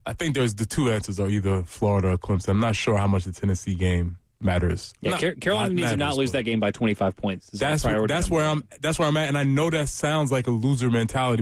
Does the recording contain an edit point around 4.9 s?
no; 0 cuts

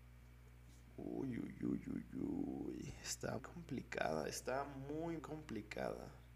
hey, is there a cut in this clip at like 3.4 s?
yes; 2 cuts; at 3.4 s, 5.2 s

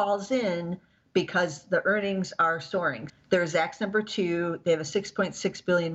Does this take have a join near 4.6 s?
no; 1 cut; at 3.1 s

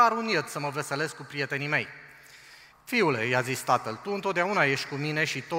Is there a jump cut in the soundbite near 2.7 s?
yes; 1 cut; at 2.7 s

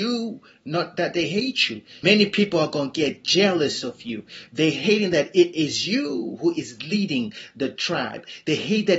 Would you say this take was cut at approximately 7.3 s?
no; 2 cuts; at 2.0 s, 4.5 s

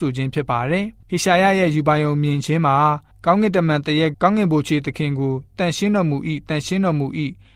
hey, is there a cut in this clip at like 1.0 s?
yes; 2 cuts; at 1.0 s, 4.1 s

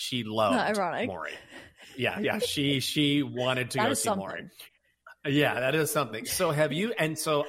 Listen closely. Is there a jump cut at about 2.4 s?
no; 0 cuts

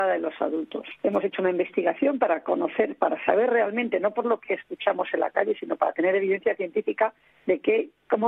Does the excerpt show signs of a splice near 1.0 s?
yes; 1 cut; at 1.0 s

